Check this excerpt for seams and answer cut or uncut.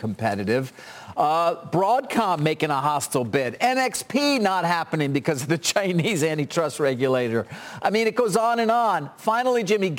uncut